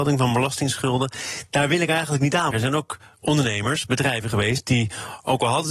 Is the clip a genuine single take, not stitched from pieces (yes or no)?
no